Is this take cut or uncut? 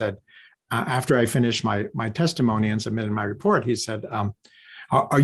uncut